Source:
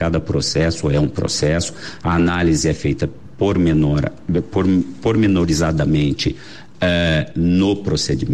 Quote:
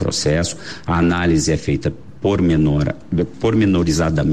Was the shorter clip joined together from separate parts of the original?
yes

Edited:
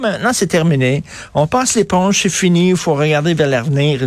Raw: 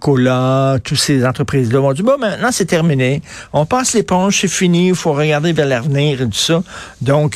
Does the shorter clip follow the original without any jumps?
yes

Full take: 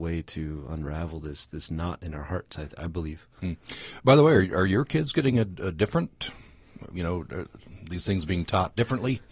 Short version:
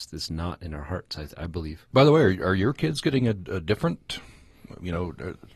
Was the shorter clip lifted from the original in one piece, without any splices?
no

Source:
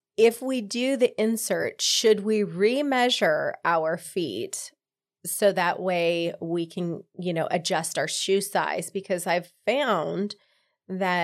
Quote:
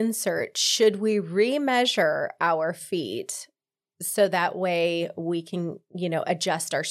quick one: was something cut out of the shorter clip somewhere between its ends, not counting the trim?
no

